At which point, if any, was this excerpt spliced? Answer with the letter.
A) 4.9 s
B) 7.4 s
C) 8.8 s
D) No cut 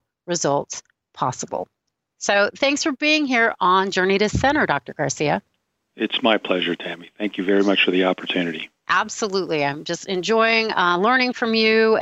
C